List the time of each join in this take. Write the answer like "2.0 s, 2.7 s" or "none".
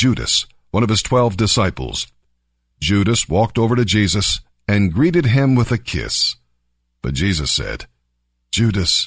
none